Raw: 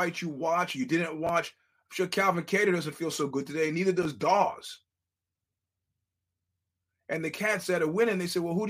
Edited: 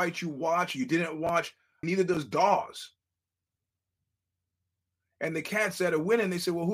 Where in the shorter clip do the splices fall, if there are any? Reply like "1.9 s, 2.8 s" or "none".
1.8 s